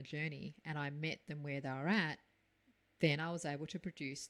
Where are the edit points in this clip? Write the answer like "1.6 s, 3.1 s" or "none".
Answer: none